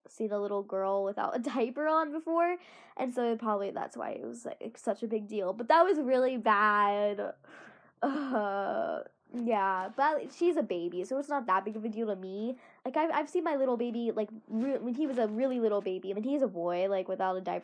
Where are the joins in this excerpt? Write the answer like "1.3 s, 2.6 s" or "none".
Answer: 12.8 s, 16.1 s